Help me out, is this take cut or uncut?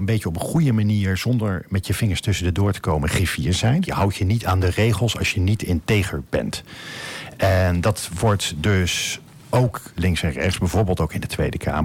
cut